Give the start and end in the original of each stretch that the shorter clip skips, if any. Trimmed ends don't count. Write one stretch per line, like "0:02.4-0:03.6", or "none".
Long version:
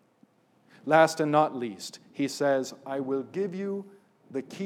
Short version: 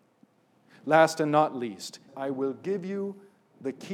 0:02.1-0:02.8